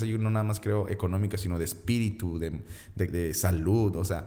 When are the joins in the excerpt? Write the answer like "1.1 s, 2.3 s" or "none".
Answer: 3.1 s